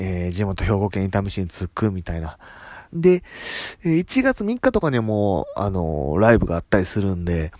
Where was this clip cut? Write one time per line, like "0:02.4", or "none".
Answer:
0:02.9

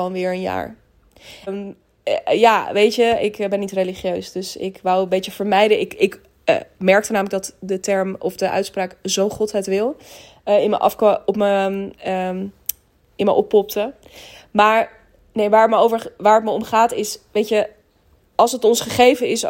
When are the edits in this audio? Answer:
0:01.5

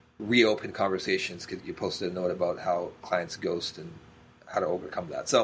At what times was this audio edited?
0:01.6

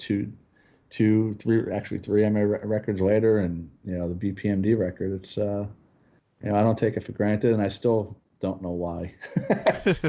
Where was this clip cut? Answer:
none

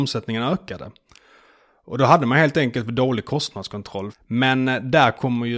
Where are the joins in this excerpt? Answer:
0:04.1

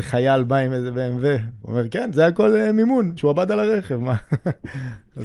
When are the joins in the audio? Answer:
0:03.2

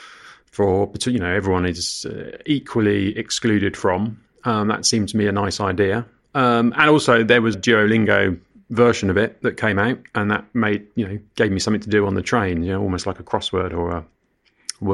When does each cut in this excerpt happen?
0:07.5

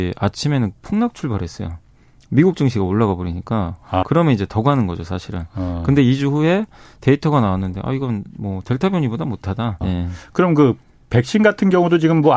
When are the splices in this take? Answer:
0:04.0
0:09.8

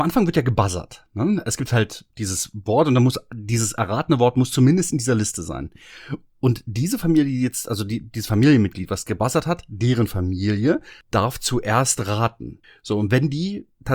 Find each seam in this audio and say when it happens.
none

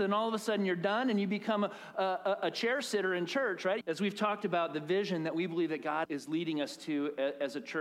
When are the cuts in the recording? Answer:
0:03.8
0:06.0

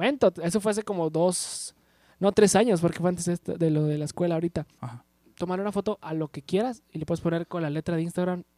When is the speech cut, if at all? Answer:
0:04.8

